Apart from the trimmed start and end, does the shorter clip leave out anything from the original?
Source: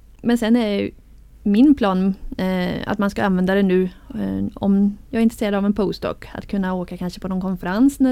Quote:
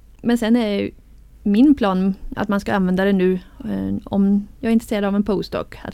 yes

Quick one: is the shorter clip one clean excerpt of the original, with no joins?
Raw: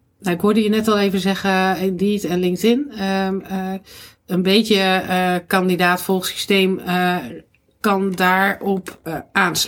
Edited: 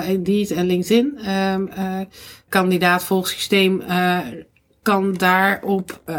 no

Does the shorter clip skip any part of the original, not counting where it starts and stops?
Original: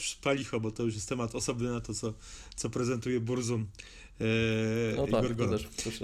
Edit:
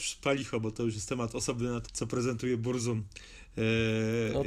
yes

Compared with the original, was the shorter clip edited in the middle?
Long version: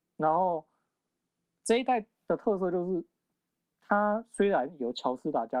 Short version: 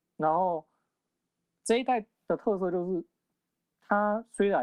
no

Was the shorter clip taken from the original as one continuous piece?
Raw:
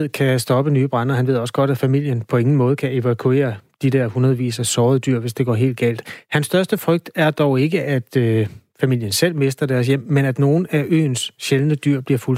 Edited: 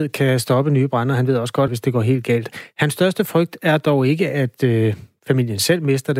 no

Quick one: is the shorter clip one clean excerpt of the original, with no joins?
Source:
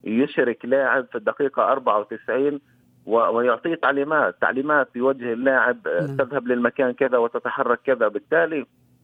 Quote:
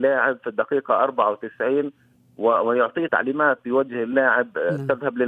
no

